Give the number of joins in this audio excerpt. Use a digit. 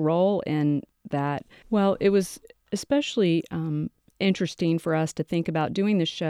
1